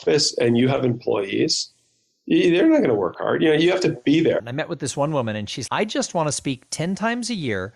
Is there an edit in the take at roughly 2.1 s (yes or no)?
no